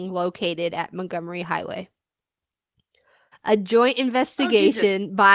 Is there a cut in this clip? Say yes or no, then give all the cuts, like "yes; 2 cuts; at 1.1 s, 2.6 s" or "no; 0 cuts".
yes; 1 cut; at 3.3 s